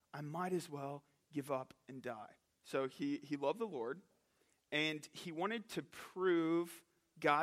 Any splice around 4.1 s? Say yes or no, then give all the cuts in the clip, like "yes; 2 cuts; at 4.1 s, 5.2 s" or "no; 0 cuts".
no; 1 cut; at 2.4 s